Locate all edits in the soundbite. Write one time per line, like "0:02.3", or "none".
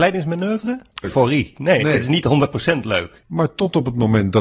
0:01.0
0:03.2